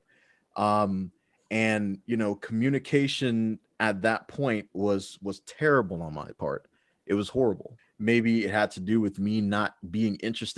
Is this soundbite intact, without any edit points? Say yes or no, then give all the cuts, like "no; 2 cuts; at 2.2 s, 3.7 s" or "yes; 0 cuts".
no; 1 cut; at 7.8 s